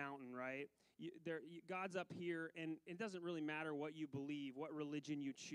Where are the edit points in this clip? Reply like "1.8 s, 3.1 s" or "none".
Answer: none